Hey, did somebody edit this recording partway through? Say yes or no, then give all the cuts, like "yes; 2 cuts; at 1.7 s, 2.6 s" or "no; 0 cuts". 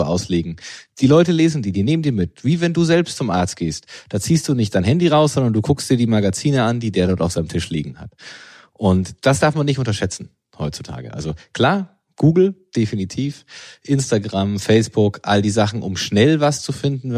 no; 0 cuts